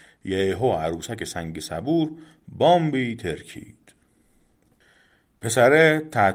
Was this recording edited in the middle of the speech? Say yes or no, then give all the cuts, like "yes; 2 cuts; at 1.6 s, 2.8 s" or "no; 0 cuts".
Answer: no; 0 cuts